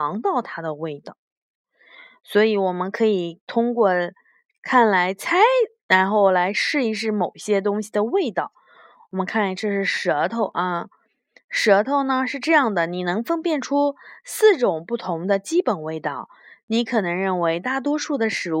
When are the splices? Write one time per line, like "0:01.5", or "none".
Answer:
none

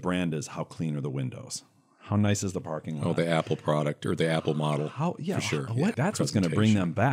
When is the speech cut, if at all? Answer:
0:05.9

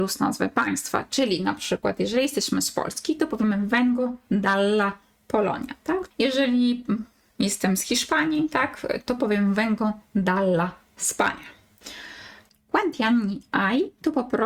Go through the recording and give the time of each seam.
0:06.1
0:12.5

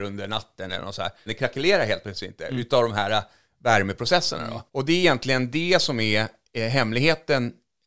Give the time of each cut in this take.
0:01.3
0:04.7

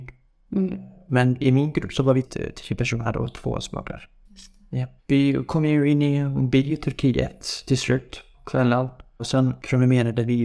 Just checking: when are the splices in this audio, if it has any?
0:02.2
0:05.0
0:09.2

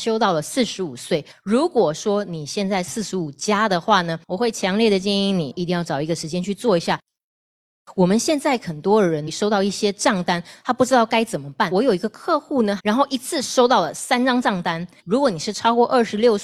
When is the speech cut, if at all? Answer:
0:12.8
0:15.0

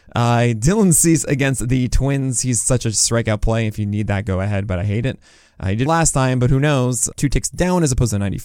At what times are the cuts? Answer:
0:05.9
0:07.1

